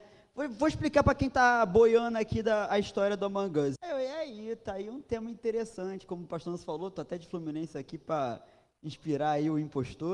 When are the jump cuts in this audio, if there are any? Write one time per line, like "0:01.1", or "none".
0:03.8